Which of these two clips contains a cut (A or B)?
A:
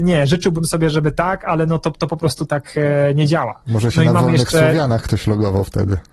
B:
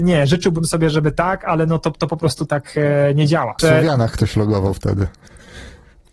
B